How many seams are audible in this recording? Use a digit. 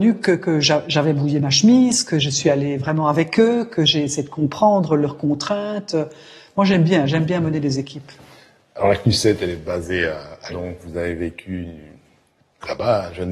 1